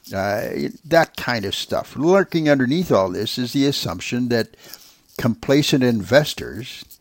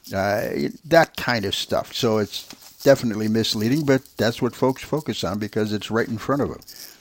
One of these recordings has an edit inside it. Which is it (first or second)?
second